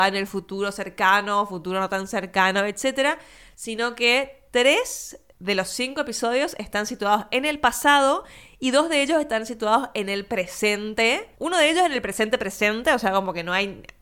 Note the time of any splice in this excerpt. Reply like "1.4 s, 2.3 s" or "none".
11.3 s